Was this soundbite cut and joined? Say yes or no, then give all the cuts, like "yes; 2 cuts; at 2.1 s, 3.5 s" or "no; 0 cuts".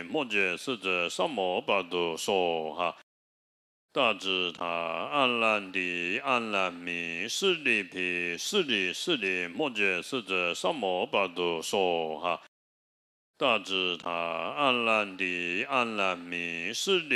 no; 0 cuts